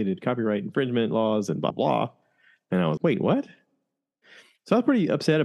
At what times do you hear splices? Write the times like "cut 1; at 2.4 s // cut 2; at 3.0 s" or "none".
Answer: cut 1; at 1.7 s // cut 2; at 3.0 s